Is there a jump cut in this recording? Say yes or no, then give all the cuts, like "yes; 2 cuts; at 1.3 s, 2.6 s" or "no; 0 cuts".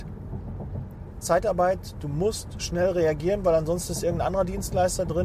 yes; 1 cut; at 1.2 s